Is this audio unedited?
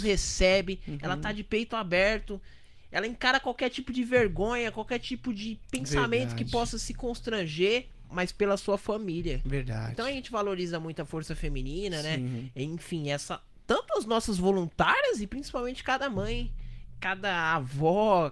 yes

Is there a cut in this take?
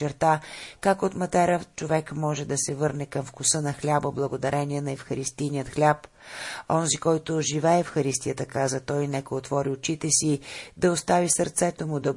no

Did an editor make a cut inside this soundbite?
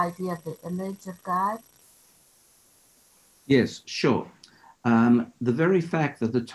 no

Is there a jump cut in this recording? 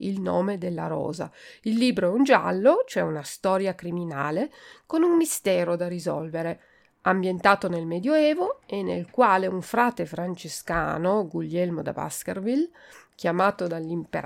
no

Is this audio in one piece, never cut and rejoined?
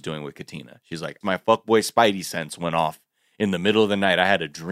no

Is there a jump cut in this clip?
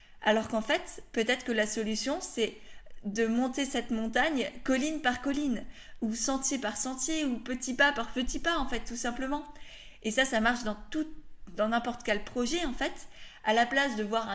no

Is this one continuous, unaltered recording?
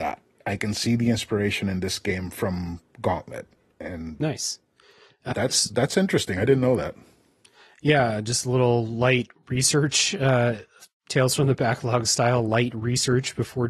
no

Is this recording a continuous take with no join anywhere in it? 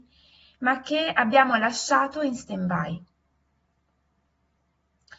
yes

